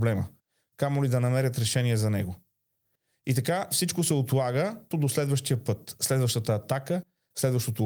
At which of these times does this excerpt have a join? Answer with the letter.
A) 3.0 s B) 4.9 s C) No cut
B